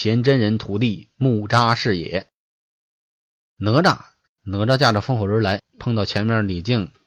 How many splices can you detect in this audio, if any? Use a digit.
2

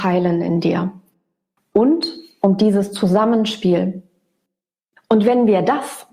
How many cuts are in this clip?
1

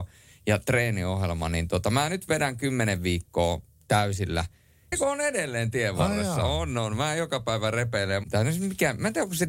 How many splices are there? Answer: 2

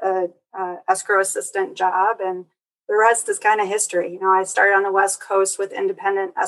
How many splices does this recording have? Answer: 0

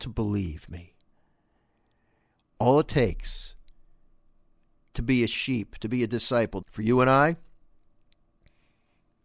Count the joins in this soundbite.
1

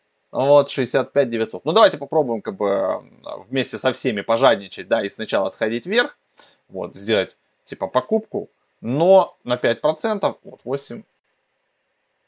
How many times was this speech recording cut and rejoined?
1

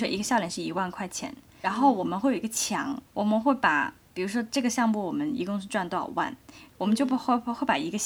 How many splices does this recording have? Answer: 1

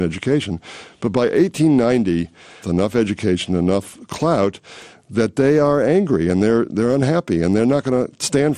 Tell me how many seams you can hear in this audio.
1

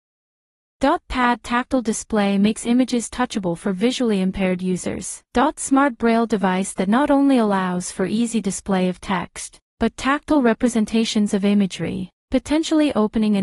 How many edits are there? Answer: 1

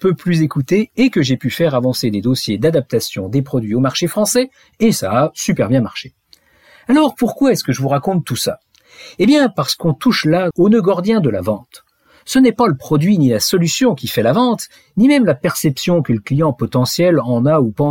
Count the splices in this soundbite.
1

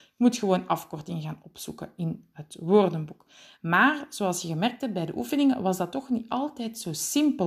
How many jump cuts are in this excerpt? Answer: 0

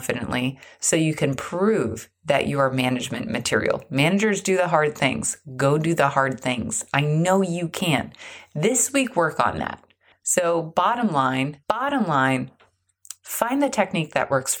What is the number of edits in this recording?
2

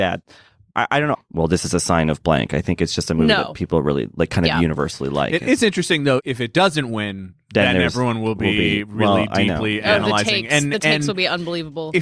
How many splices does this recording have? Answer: 1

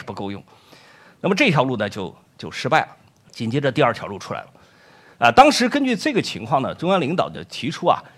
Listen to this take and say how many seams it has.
0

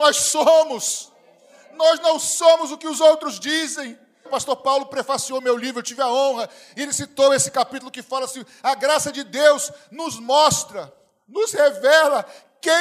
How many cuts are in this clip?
1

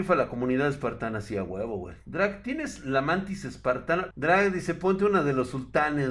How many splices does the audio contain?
1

